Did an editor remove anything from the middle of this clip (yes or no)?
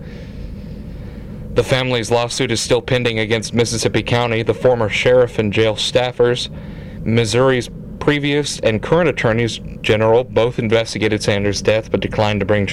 no